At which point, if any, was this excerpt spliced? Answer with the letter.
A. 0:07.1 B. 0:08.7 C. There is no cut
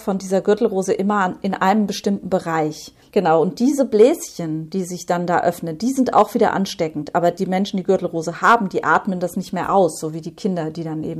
C